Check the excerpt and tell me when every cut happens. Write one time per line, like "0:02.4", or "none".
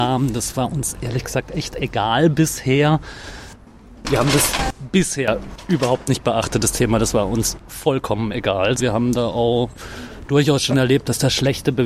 0:04.0
0:08.8